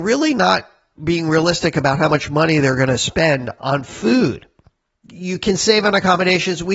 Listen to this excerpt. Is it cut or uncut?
cut